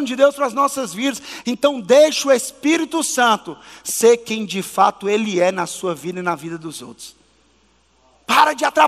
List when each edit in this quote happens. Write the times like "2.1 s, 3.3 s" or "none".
1.4 s